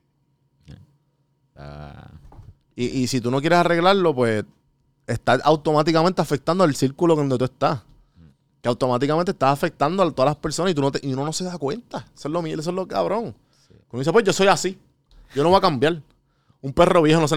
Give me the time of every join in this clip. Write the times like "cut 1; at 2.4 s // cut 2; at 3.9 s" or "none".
cut 1; at 1.6 s